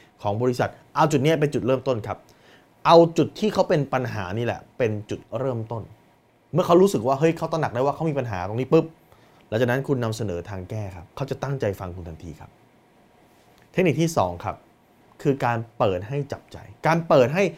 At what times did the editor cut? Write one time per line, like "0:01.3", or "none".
0:11.1